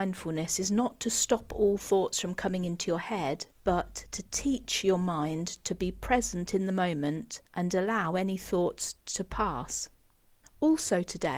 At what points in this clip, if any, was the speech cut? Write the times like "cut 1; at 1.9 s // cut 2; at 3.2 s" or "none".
cut 1; at 3.5 s // cut 2; at 7.5 s